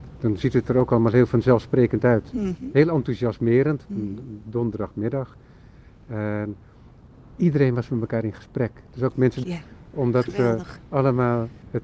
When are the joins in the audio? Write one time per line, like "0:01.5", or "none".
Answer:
0:03.8
0:09.4